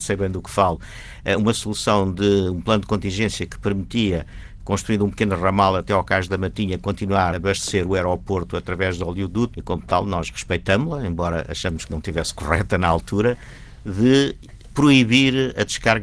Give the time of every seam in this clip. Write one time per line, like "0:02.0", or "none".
0:07.3
0:09.5

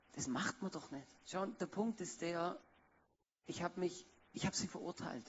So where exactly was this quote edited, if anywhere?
0:01.2

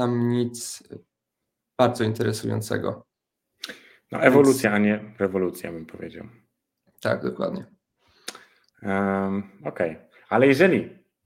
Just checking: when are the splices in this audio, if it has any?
none

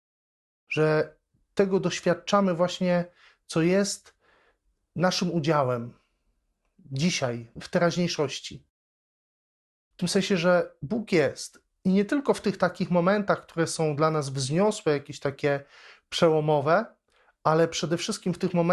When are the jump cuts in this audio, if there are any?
0:09.8

